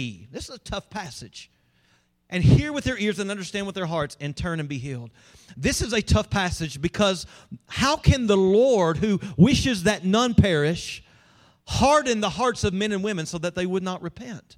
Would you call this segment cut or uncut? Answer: uncut